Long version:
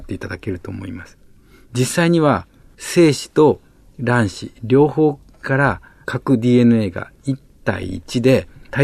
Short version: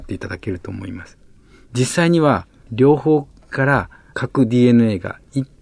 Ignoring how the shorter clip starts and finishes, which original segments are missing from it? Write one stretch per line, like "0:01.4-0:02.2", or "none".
0:02.7-0:04.6